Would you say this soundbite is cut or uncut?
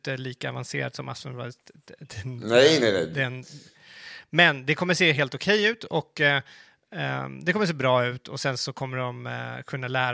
uncut